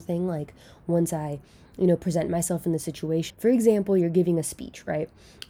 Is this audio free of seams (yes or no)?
no